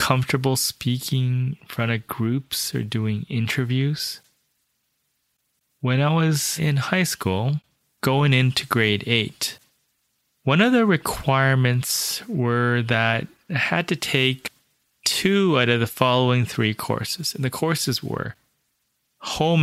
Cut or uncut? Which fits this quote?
uncut